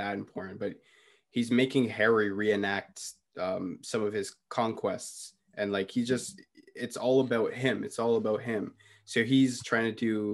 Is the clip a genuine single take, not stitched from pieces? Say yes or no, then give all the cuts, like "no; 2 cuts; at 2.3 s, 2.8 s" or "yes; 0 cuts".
yes; 0 cuts